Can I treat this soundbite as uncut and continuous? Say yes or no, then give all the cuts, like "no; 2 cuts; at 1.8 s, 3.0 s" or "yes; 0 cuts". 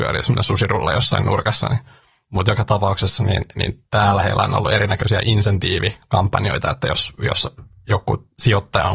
yes; 0 cuts